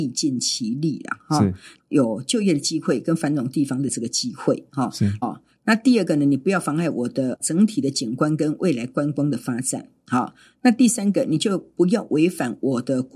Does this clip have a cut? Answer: yes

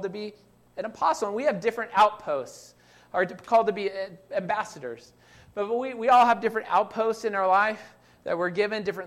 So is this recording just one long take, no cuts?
yes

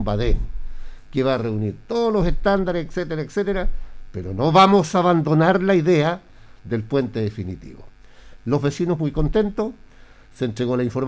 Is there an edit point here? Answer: no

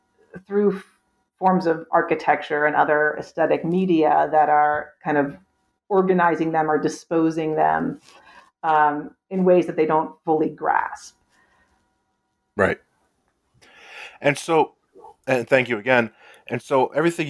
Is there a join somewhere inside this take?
no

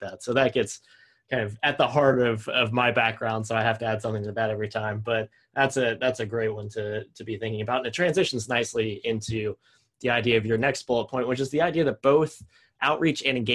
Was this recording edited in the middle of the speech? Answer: no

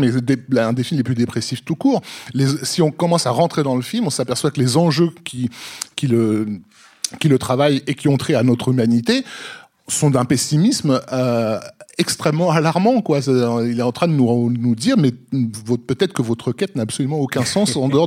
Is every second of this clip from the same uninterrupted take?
yes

